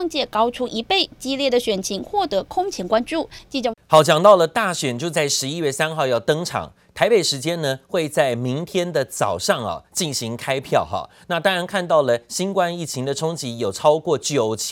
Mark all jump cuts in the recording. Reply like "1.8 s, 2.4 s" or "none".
3.7 s